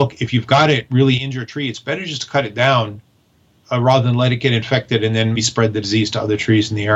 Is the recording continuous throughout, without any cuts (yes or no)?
no